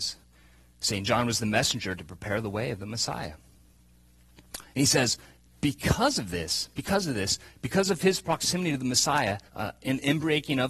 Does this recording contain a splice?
yes; 1 cut; at 9.5 s

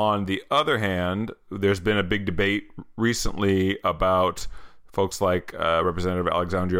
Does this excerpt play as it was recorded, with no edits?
yes; 0 cuts

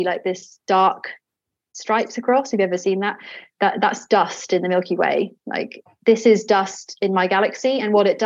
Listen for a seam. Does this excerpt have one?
no; 0 cuts

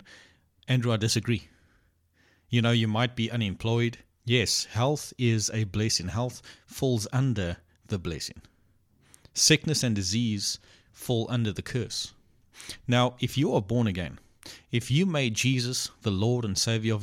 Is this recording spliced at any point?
yes; 1 cut; at 4.2 s

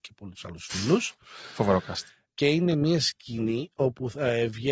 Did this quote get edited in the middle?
no; 0 cuts

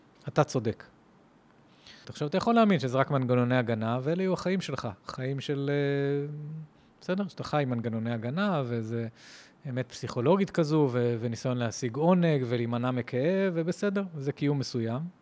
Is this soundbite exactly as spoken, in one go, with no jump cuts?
no; 1 cut; at 2.0 s

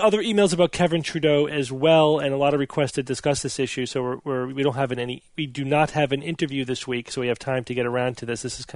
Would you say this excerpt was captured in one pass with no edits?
yes; 0 cuts

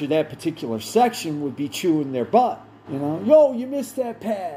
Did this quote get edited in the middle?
yes; 1 cut; at 2.8 s

